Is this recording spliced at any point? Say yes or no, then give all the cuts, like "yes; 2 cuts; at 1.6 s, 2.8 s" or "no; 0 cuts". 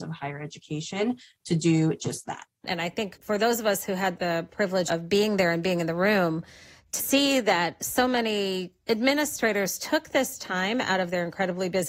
yes; 1 cut; at 2.6 s